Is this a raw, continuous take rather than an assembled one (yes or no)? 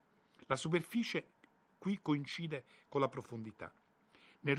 yes